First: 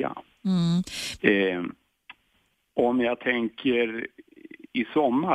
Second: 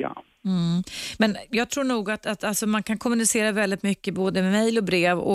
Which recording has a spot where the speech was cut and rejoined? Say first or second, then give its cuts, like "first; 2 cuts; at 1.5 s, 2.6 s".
first; 1 cut; at 1.2 s